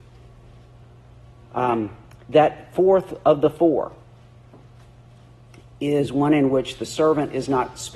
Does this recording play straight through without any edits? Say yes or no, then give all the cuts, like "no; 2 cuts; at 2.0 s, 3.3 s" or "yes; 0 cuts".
yes; 0 cuts